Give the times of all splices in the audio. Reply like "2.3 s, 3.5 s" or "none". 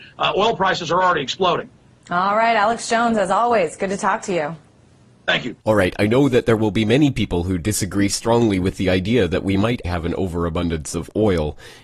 5.6 s, 9.8 s